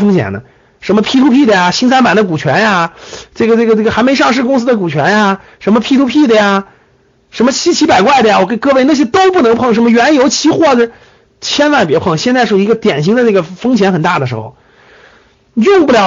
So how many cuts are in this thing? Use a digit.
1